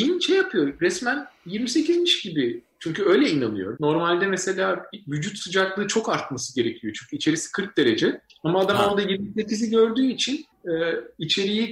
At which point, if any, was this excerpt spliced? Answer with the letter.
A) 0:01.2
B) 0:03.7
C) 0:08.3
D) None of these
B